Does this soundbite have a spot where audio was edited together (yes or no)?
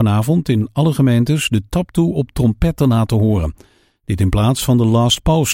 no